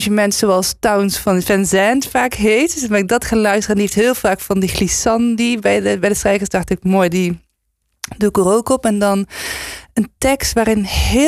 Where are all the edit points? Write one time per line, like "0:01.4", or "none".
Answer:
none